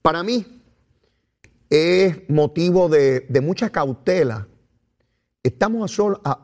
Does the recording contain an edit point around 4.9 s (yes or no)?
no